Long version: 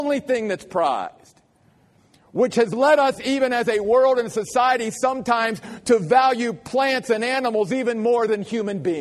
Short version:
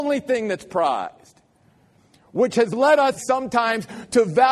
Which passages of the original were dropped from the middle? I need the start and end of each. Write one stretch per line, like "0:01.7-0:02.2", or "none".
0:03.2-0:04.9